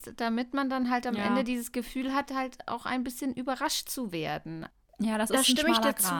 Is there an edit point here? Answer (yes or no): no